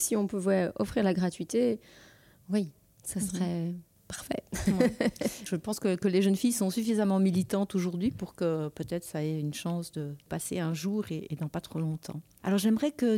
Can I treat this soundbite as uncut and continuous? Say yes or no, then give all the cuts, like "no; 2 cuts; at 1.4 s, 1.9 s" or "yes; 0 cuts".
yes; 0 cuts